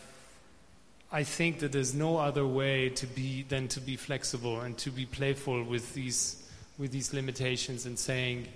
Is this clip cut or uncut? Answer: uncut